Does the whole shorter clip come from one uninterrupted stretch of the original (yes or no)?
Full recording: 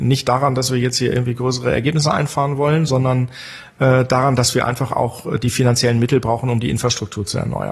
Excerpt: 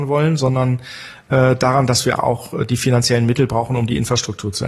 no